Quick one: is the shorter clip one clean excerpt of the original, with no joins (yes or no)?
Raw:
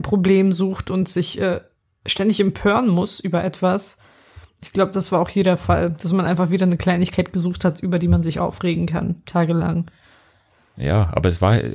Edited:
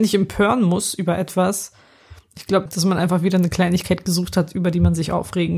no